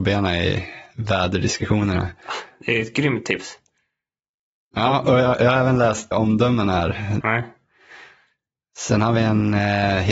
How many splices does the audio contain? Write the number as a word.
two